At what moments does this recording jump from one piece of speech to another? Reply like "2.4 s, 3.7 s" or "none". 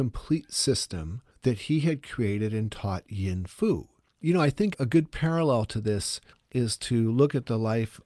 4.0 s